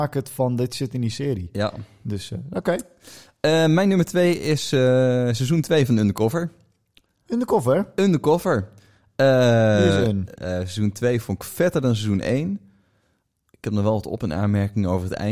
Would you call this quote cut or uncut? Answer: cut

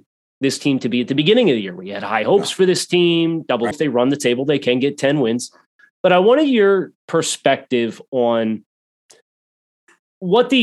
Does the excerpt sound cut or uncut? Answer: cut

